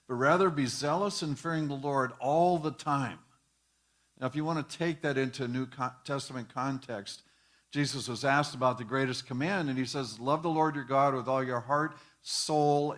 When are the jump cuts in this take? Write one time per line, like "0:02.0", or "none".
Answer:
none